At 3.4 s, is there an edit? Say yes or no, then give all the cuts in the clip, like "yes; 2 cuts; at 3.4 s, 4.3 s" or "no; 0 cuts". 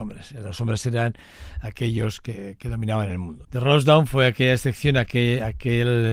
yes; 1 cut; at 3.4 s